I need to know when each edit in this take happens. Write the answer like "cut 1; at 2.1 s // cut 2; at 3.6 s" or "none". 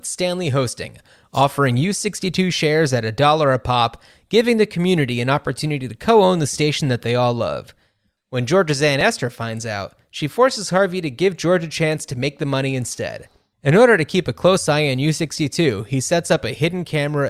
cut 1; at 8.2 s // cut 2; at 13.5 s